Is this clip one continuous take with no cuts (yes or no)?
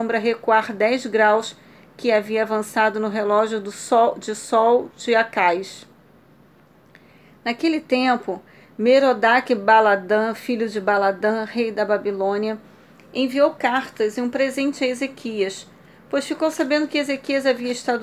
yes